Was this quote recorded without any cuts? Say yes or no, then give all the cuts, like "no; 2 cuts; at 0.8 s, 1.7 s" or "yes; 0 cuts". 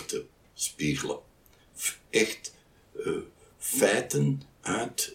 yes; 0 cuts